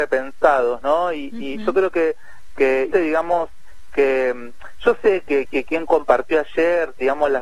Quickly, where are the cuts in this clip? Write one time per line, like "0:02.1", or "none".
0:02.9
0:05.4